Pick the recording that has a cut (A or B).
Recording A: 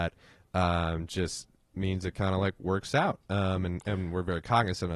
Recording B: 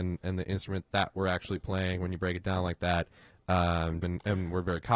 B